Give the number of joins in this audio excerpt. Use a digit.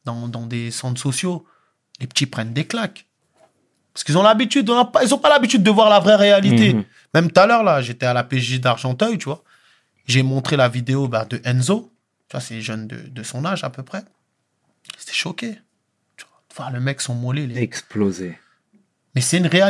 1